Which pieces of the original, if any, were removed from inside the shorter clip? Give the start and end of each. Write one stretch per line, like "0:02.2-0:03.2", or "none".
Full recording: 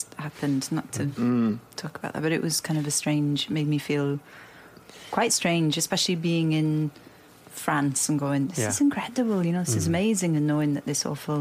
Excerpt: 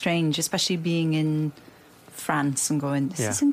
none